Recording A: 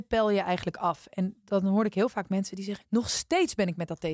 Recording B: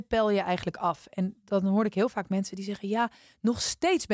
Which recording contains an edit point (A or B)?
A